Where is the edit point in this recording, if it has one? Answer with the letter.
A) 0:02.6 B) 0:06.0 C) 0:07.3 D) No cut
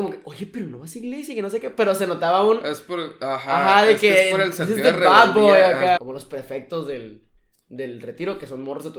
B